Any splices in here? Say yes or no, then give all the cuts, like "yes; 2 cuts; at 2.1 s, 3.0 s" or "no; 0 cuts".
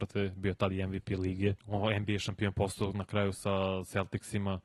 yes; 1 cut; at 1.6 s